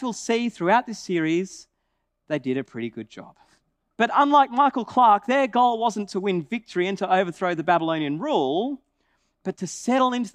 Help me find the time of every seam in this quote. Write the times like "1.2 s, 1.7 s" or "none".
3.9 s